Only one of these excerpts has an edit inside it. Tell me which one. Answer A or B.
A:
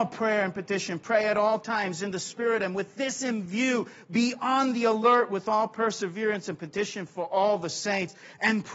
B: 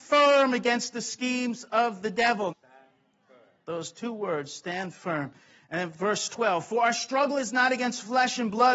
B